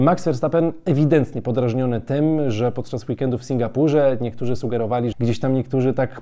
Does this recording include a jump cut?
yes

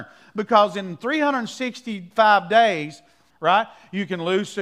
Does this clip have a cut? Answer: yes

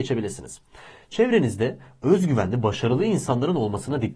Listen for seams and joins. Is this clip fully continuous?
yes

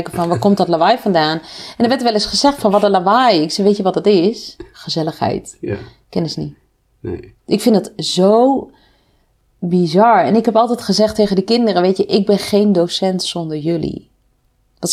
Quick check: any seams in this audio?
no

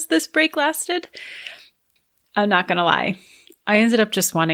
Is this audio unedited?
yes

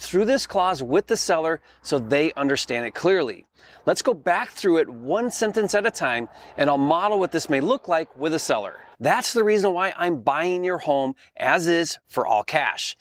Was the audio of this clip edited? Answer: yes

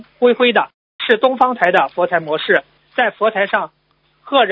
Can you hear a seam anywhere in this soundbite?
yes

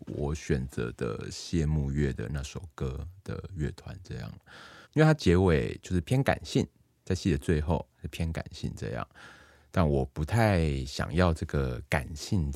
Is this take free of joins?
no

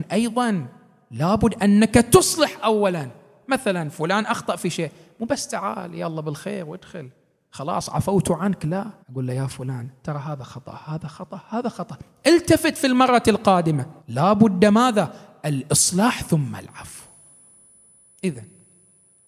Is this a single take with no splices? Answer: no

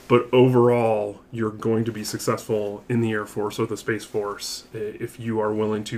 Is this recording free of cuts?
yes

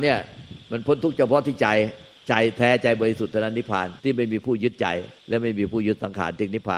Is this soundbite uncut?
no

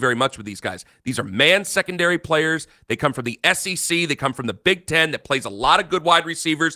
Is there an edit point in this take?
no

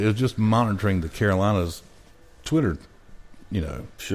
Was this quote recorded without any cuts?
yes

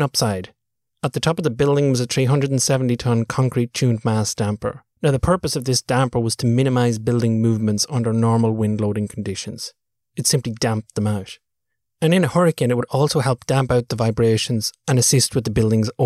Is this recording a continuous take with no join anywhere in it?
no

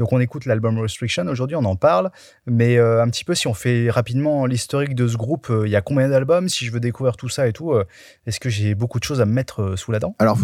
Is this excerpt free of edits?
yes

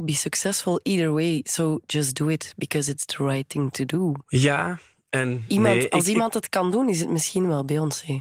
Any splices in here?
no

